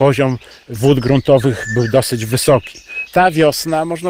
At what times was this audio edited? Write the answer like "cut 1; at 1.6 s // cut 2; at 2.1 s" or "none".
cut 1; at 3.1 s